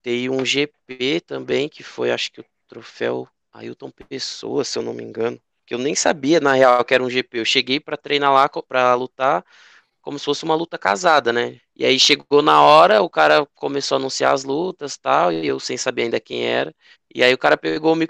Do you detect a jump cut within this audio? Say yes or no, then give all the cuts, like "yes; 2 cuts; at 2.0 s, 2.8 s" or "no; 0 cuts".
yes; 2 cuts; at 11.6 s, 16.9 s